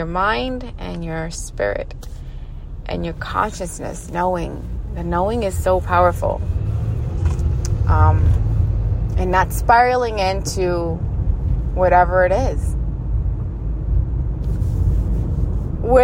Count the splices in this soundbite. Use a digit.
0